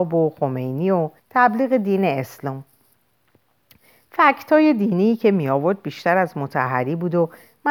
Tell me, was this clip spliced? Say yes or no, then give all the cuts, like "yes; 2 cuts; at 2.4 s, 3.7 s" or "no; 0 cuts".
yes; 1 cut; at 1.2 s